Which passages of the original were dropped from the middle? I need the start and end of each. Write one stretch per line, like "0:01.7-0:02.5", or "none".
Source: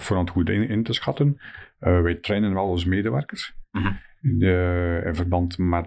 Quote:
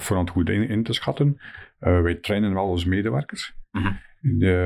none